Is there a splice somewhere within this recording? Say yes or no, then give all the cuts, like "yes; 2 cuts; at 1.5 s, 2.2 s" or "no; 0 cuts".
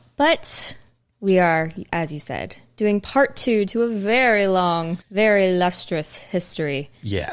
yes; 1 cut; at 5.0 s